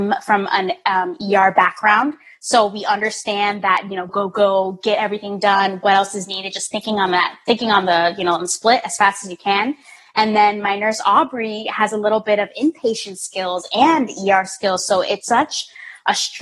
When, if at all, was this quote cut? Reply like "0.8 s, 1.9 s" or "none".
4.1 s, 15.2 s